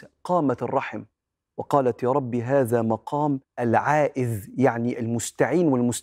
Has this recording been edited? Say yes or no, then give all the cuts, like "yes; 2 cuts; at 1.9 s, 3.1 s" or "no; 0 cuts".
yes; 1 cut; at 3.5 s